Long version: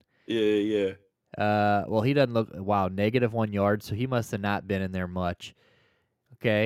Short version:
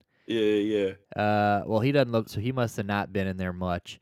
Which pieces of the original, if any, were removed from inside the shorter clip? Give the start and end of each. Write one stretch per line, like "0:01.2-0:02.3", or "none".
0:01.0-0:01.2
0:02.5-0:03.8